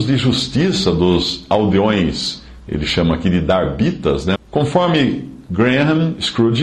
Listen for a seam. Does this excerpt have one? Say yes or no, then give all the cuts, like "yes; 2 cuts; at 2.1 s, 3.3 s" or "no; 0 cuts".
yes; 1 cut; at 4.4 s